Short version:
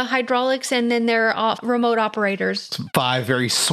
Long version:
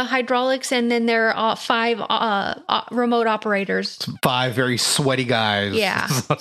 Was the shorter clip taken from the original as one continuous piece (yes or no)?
no